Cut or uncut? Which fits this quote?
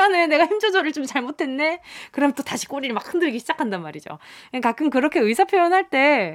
uncut